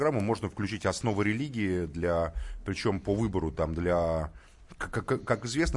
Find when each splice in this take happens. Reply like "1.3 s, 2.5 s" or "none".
none